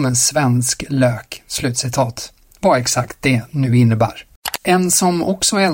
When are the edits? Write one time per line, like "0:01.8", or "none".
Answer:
none

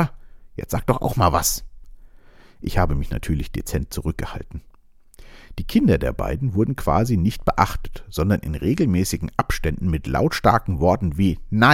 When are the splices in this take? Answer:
none

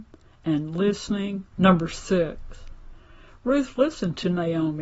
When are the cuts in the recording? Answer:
0:01.5

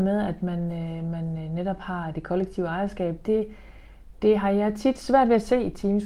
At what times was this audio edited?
none

